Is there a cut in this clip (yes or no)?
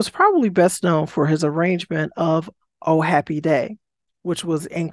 no